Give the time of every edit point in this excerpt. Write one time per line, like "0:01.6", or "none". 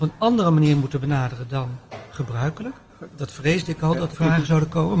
0:03.1
0:04.1